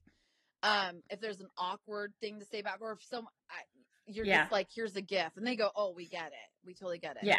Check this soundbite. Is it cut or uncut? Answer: uncut